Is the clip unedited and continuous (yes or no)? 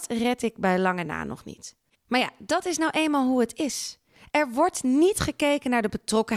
no